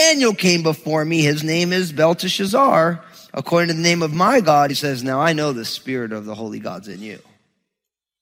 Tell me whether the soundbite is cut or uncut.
cut